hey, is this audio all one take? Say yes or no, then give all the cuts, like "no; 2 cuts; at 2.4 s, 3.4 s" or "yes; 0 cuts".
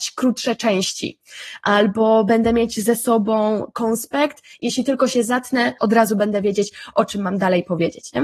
no; 1 cut; at 5.8 s